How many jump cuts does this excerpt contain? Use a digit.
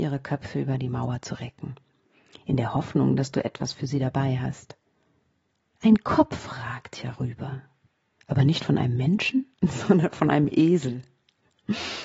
2